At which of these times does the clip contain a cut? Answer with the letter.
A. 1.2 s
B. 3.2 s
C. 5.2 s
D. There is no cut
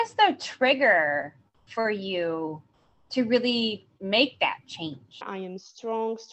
C